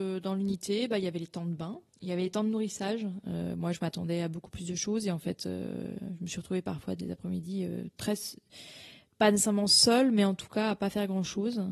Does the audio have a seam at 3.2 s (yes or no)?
yes